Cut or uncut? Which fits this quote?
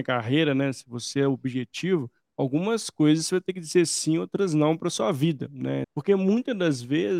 cut